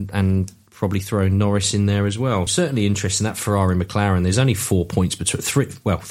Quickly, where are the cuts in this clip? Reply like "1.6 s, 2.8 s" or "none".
2.5 s

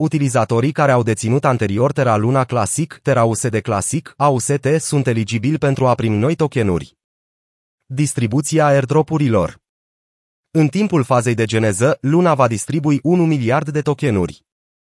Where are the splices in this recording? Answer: 3.0 s, 4.2 s

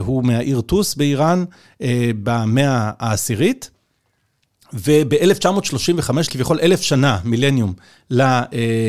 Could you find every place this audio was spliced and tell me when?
6.3 s

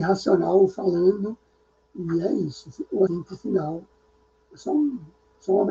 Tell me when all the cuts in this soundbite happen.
3.1 s

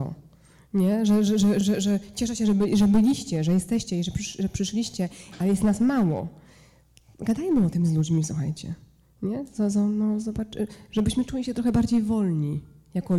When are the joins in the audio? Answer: none

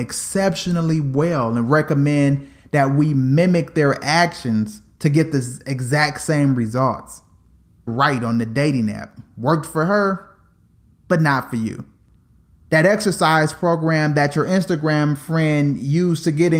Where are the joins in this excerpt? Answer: 7.9 s

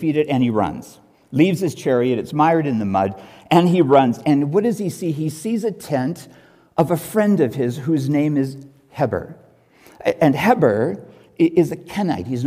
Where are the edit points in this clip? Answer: none

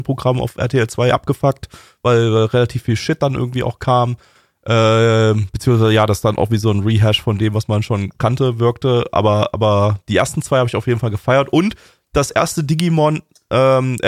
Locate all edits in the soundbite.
none

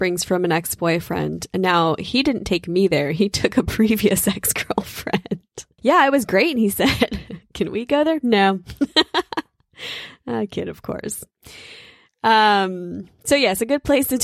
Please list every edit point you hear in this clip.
5.8 s

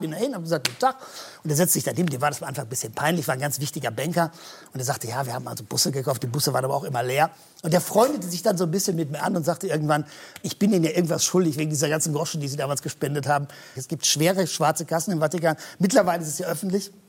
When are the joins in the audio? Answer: 10.4 s, 13.7 s

